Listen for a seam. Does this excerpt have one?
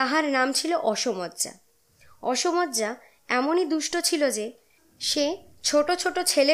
no; 0 cuts

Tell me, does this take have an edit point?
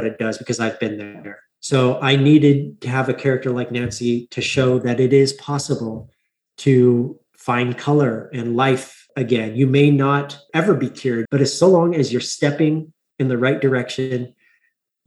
yes; 1 cut; at 11.3 s

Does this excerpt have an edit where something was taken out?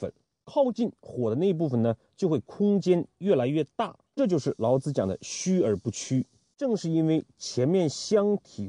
yes; 1 cut; at 4.1 s

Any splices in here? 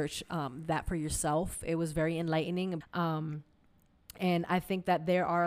yes; 1 cut; at 2.8 s

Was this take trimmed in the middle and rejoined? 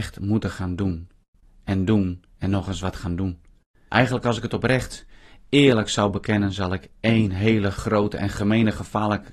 yes; 1 cut; at 3.9 s

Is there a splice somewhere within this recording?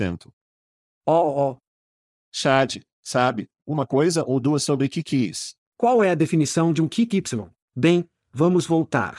yes; 2 cuts; at 5.7 s, 7.7 s

